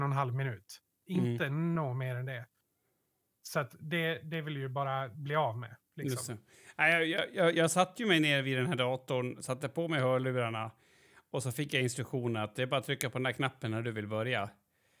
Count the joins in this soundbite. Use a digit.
0